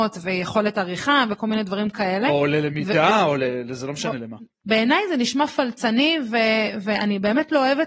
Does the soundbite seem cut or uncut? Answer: cut